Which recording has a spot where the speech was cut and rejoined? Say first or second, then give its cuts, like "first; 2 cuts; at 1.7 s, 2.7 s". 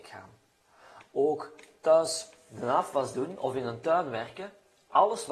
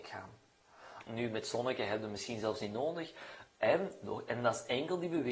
second; 2 cuts; at 1.1 s, 3.5 s